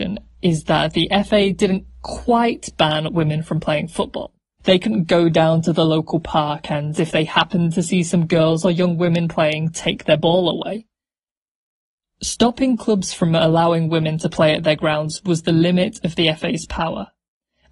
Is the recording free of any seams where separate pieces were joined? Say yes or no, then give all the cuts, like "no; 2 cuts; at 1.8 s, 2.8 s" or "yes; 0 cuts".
no; 1 cut; at 4.6 s